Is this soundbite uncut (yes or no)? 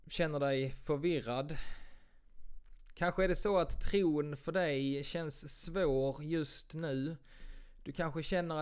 yes